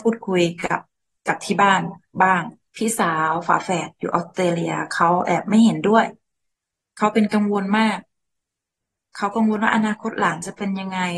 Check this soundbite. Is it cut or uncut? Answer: uncut